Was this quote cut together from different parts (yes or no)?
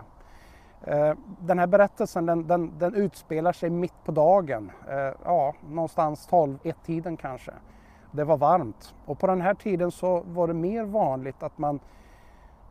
no